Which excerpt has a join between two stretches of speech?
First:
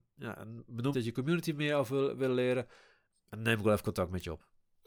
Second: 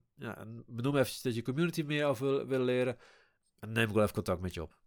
first; 1 cut; at 0.9 s

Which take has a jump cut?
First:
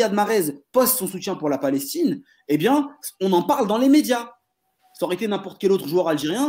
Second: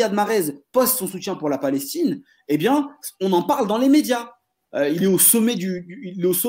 second; 1 cut; at 4.6 s

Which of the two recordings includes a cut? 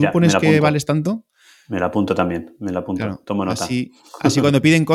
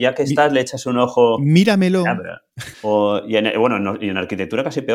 second; 1 cut; at 2.7 s

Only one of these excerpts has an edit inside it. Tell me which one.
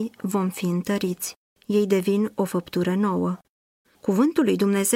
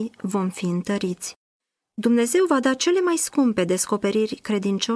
first; 2 cuts; at 1.5 s, 3.8 s

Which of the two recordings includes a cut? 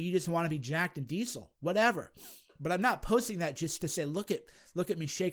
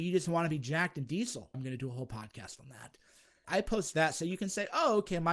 second; 2 cuts; at 1.5 s, 3.4 s

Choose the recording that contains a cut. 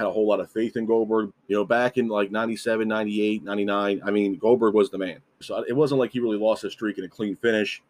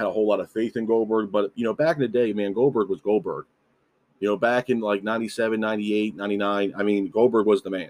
first; 2 cuts; at 1.3 s, 5.4 s

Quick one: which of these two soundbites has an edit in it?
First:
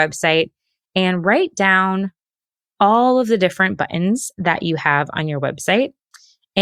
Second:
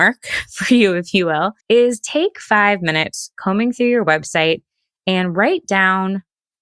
second; 1 cut; at 1.6 s

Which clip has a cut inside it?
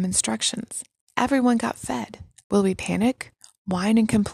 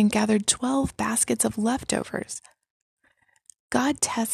first; 2 cuts; at 1.1 s, 2.4 s

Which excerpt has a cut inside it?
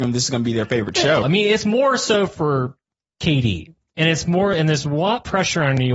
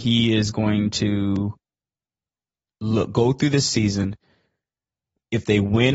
first; 1 cut; at 1.2 s

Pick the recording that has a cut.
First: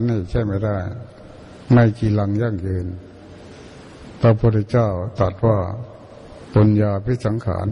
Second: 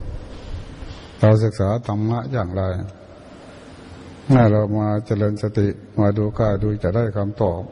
second; 1 cut; at 6.8 s

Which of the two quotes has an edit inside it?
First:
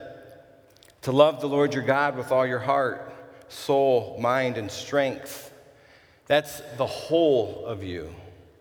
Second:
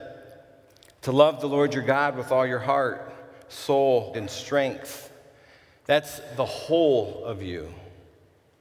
second; 1 cut; at 4.1 s

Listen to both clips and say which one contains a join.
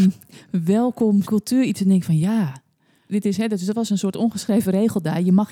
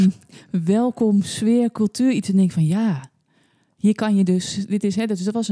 first; 2 cuts; at 1.2 s, 3.1 s

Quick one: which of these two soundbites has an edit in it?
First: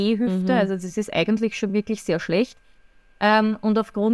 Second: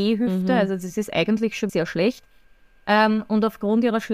second; 1 cut; at 1.7 s

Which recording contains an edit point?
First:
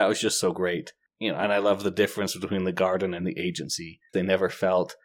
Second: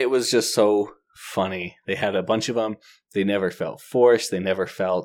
first; 1 cut; at 4.1 s

